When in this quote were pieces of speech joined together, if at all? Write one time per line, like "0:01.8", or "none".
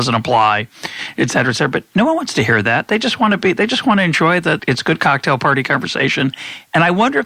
0:04.6

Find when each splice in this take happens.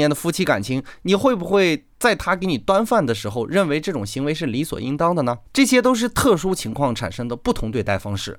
0:05.4

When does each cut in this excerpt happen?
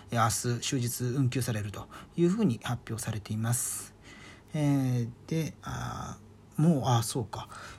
0:05.6

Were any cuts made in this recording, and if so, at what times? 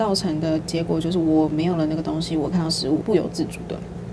0:03.0

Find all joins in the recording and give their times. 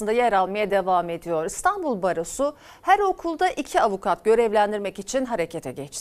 none

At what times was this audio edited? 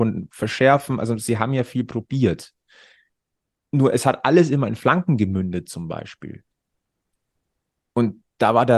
none

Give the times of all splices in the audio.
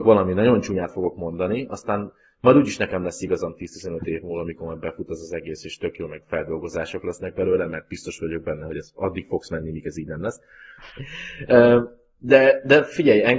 0:10.8

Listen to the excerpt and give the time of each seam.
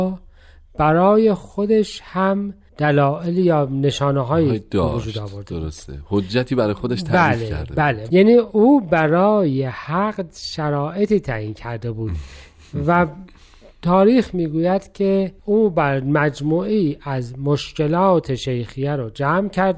none

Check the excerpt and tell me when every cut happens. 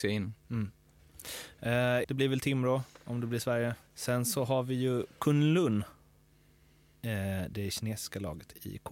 0:02.0
0:03.9

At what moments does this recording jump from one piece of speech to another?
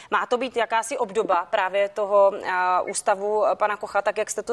none

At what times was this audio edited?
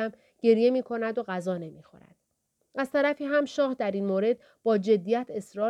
none

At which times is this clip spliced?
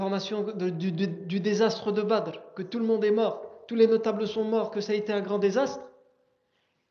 none

